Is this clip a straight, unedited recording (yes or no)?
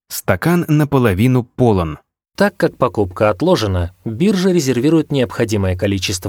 no